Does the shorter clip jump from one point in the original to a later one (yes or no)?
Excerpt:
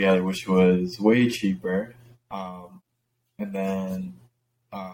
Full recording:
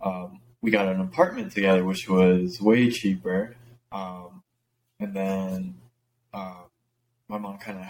no